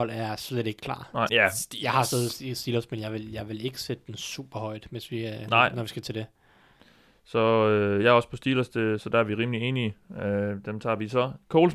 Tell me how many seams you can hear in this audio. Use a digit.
1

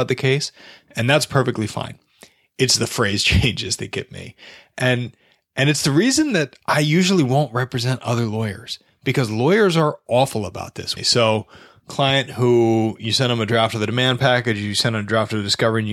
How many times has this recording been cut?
1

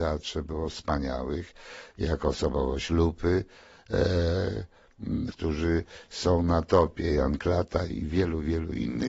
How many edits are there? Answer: 1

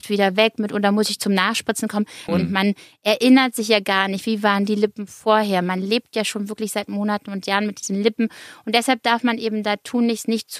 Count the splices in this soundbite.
1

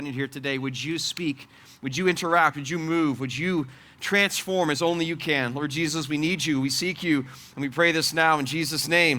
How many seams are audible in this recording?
0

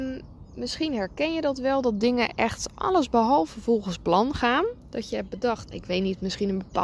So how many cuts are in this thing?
1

